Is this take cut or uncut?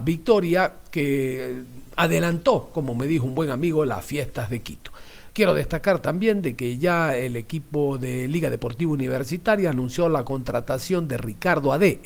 uncut